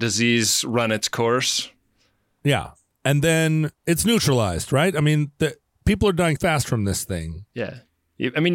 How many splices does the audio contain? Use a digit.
2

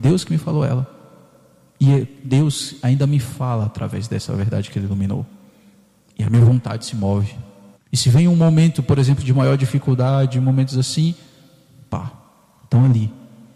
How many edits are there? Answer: 1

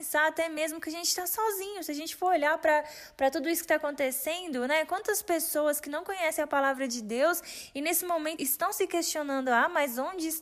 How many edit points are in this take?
1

